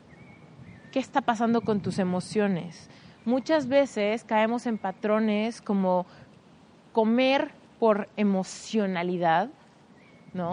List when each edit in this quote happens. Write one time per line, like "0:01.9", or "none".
none